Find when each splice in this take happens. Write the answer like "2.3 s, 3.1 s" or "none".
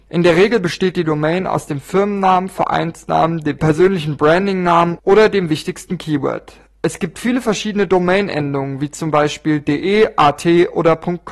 none